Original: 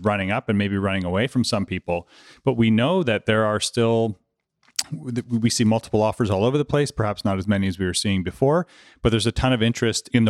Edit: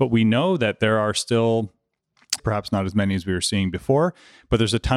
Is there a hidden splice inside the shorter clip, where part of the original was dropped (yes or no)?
yes